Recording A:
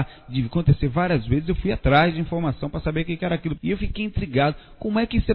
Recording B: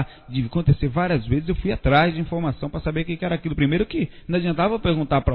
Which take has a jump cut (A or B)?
A